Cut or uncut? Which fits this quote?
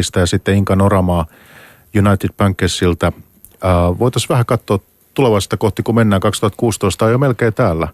uncut